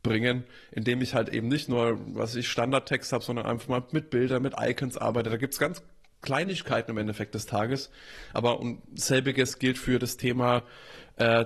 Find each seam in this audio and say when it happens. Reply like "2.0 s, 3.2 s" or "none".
none